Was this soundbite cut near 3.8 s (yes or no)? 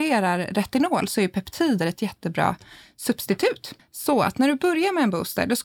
yes